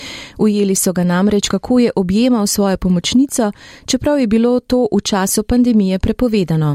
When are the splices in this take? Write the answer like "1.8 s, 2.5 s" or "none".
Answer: none

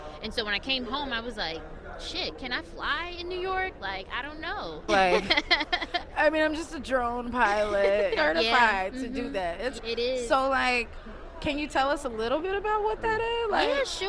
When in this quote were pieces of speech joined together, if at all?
4.9 s, 8.2 s, 9.8 s

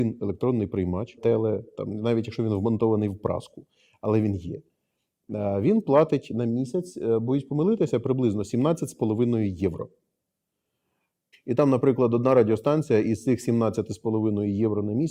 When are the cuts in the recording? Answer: 1.2 s, 11.3 s

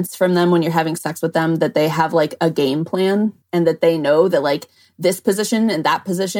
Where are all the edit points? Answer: 3.4 s

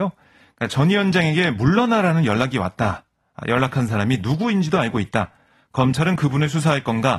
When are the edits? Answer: none

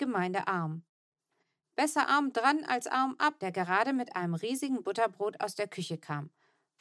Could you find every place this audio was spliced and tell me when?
3.4 s

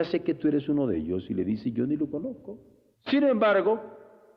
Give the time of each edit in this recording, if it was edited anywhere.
2.9 s

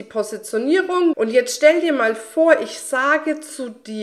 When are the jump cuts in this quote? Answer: 1.1 s

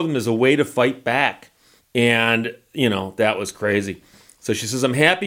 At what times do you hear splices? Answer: 1.8 s

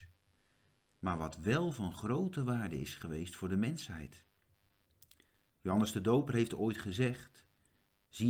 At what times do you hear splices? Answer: none

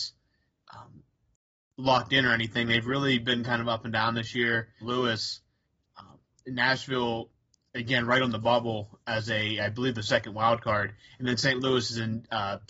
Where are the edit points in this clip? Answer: 4.8 s

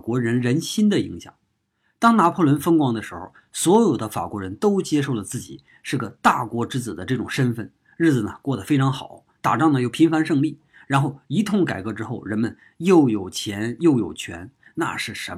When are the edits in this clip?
none

